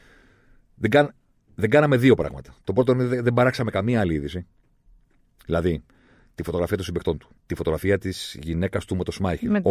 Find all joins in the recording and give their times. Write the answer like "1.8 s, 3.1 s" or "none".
7.4 s

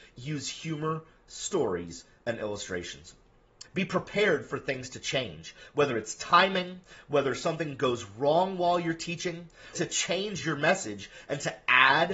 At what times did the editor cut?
3.6 s, 9.7 s

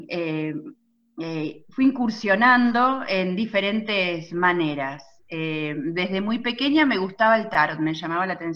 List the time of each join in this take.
none

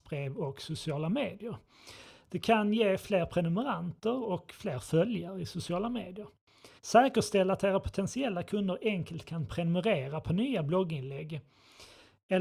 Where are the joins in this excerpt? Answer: 6.8 s

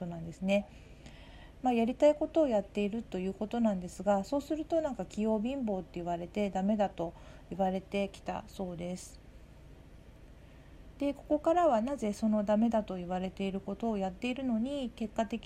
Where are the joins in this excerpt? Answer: none

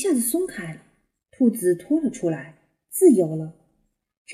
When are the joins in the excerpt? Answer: none

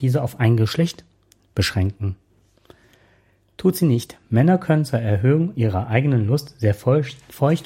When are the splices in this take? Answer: none

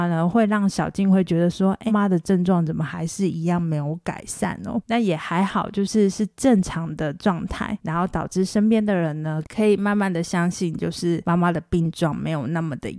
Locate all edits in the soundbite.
1.9 s

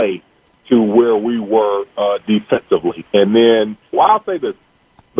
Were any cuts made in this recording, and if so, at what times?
3.9 s

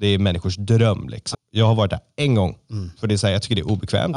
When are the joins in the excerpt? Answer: 1.3 s

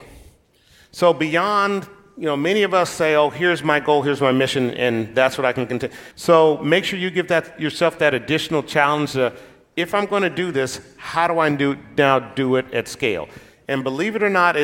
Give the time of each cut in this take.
6.1 s

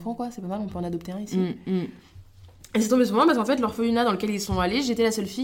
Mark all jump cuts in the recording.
none

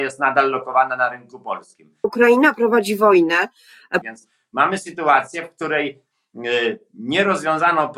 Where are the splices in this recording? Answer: 2.0 s, 4.0 s

